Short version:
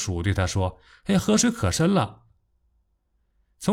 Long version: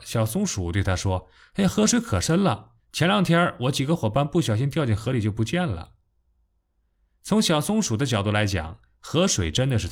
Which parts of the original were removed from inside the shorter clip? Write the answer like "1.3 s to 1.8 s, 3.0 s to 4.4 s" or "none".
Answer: 2.8 s to 5.9 s